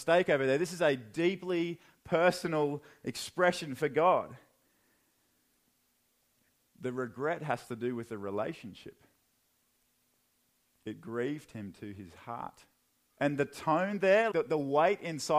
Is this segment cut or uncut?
cut